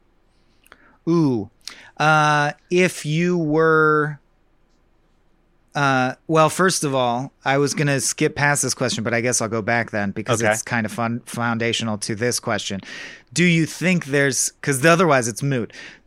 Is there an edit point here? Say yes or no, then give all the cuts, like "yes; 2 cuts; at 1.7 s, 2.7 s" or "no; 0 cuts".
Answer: no; 0 cuts